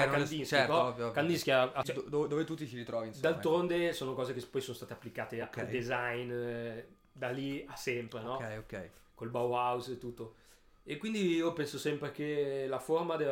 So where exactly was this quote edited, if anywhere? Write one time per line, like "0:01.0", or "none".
0:01.8